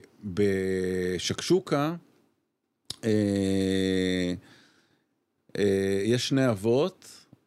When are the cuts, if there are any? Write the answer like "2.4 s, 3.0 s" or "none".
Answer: none